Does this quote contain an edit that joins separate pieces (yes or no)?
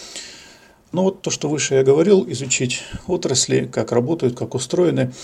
yes